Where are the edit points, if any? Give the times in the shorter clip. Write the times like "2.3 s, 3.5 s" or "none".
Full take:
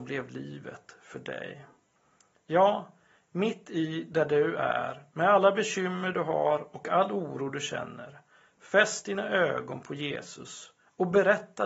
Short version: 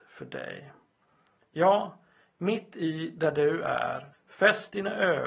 4.1 s